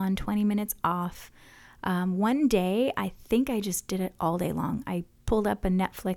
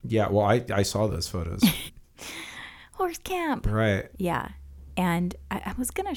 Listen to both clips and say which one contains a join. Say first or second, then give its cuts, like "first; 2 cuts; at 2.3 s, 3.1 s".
second; 2 cuts; at 1.9 s, 4.1 s